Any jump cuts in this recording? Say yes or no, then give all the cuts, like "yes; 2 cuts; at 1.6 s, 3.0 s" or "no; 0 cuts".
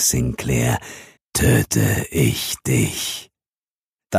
yes; 1 cut; at 1.2 s